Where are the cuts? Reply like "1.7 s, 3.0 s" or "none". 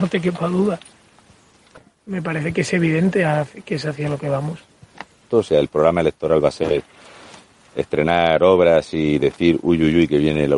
1.8 s, 5.3 s